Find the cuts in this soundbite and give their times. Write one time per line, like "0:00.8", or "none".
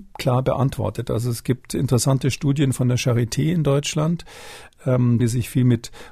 0:05.2